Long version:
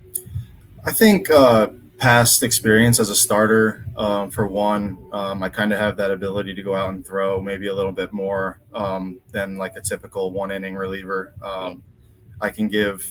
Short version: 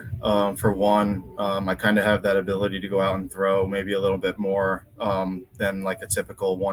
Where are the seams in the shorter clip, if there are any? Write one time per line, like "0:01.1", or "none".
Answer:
none